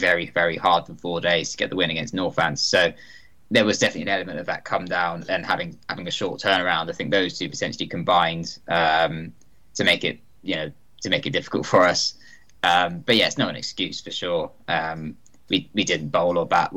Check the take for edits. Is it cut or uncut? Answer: uncut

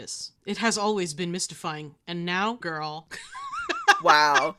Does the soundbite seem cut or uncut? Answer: cut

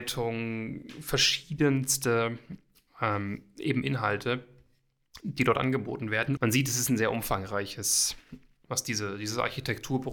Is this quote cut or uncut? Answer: cut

